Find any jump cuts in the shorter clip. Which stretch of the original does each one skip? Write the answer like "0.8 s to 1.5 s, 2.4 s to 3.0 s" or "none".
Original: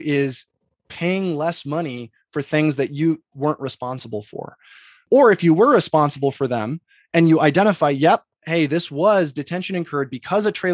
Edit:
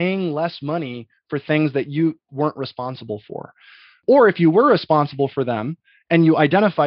none